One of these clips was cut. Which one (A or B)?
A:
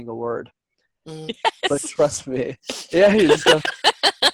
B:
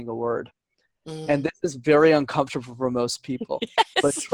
A